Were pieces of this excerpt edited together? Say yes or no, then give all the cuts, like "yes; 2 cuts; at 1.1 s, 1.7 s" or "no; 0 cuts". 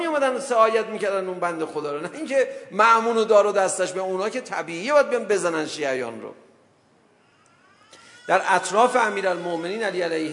no; 0 cuts